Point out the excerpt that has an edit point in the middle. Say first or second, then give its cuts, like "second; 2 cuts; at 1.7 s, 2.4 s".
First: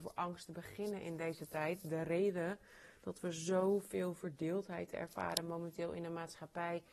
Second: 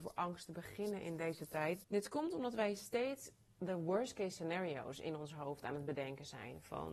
second; 1 cut; at 1.8 s